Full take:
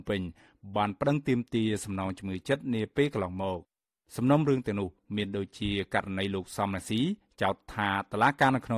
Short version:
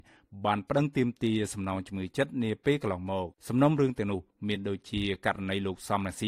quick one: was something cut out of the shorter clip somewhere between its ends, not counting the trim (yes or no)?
yes